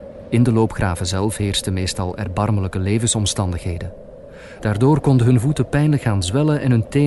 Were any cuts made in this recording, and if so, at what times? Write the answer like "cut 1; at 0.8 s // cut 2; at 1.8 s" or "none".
cut 1; at 4.6 s

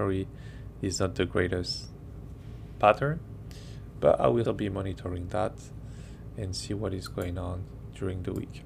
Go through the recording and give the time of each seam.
cut 1; at 4.5 s

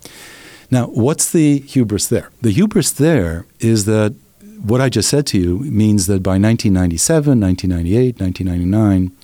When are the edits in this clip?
cut 1; at 2.4 s

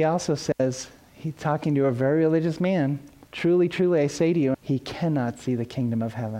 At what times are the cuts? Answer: cut 1; at 3.3 s // cut 2; at 4.5 s

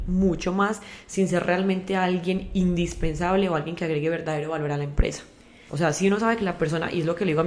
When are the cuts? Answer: cut 1; at 5.7 s

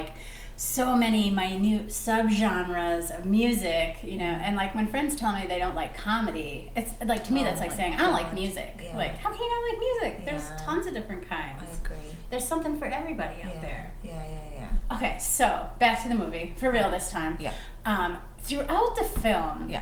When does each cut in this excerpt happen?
none

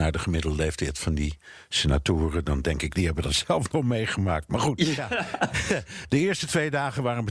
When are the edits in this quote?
cut 1; at 5.0 s

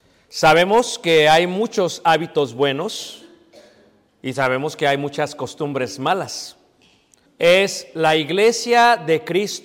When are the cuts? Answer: cut 1; at 7.3 s

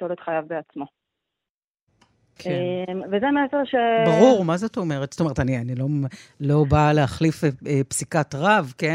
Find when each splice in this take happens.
none

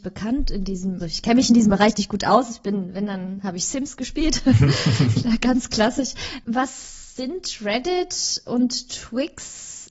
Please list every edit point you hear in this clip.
cut 1; at 1.0 s

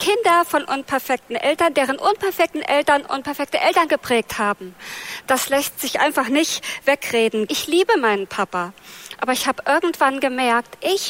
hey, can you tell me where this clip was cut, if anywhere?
cut 1; at 7.5 s

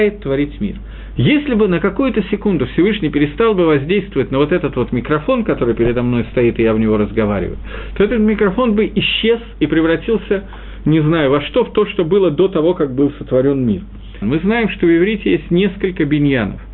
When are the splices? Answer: cut 1; at 1.2 s // cut 2; at 14.2 s

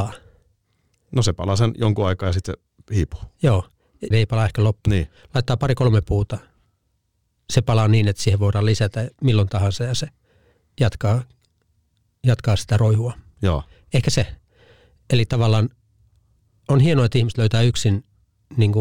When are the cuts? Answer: cut 1; at 4.1 s

